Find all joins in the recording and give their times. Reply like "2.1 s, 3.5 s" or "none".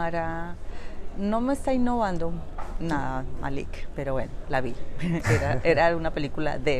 none